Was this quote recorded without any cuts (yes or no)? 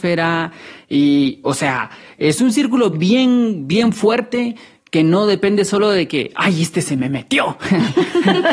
yes